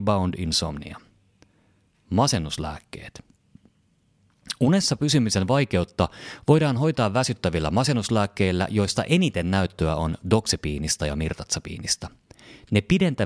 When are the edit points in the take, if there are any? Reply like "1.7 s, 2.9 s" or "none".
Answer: none